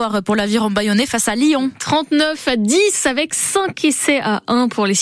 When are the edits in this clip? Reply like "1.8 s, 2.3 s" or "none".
none